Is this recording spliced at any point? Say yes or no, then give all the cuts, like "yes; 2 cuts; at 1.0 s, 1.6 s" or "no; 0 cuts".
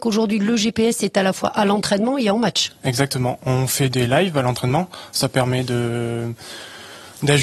no; 0 cuts